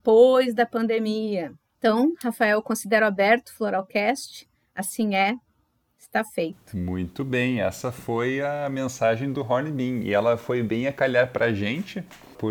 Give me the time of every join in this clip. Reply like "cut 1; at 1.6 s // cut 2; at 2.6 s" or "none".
none